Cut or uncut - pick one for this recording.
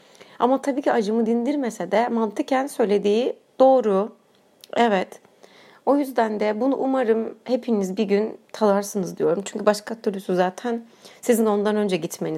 uncut